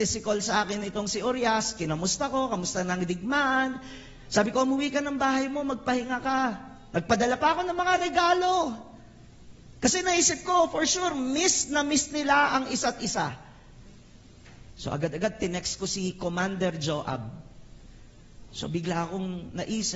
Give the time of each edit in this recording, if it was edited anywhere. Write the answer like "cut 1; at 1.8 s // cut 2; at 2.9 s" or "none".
cut 1; at 14.7 s // cut 2; at 18.5 s

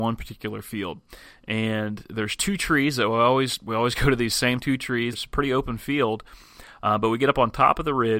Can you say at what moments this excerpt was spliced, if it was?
cut 1; at 5.1 s

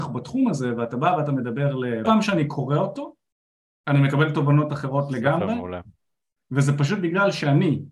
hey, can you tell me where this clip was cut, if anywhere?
cut 1; at 2.0 s

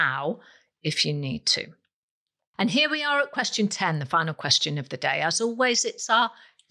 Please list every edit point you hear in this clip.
none

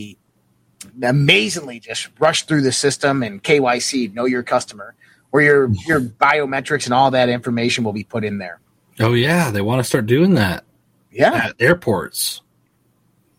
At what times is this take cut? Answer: cut 1; at 0.9 s

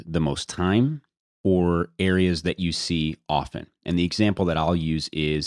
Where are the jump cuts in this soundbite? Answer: none

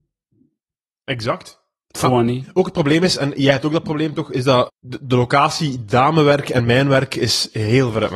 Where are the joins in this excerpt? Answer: cut 1; at 4.7 s

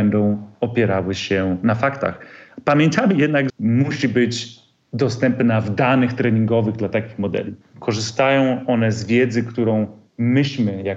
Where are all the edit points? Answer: cut 1; at 3.5 s // cut 2; at 7.6 s

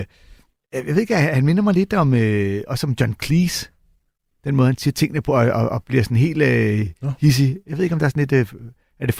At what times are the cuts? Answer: none

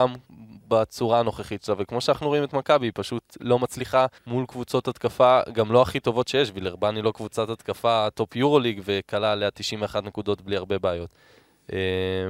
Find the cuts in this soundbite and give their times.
cut 1; at 4.2 s

